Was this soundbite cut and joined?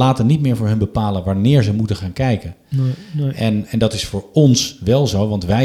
yes; 1 cut; at 3.7 s

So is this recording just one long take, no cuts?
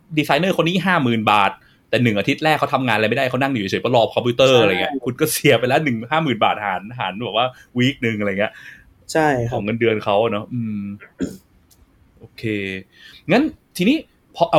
yes; 0 cuts

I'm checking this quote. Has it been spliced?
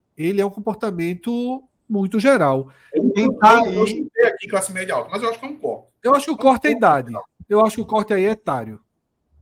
yes; 1 cut; at 2.9 s

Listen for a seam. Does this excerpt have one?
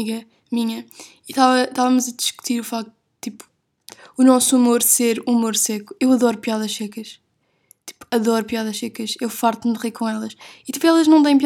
no; 0 cuts

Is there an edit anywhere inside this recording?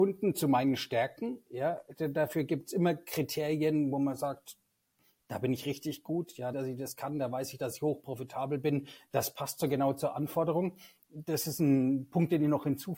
yes; 1 cut; at 6.5 s

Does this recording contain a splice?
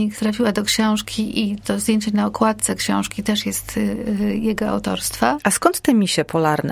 no; 0 cuts

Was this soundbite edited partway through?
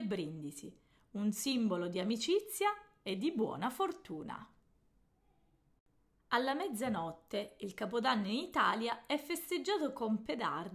no; 0 cuts

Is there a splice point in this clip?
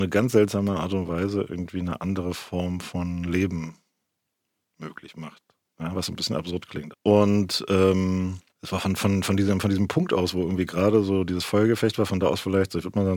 yes; 2 cuts; at 6.9 s, 8.5 s

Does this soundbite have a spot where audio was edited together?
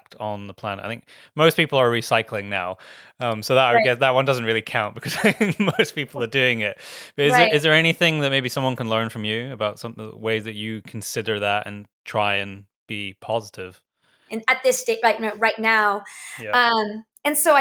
yes; 1 cut; at 14.3 s

